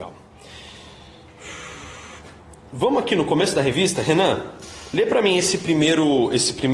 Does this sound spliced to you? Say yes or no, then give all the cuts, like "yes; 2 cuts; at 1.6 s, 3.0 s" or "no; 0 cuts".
no; 0 cuts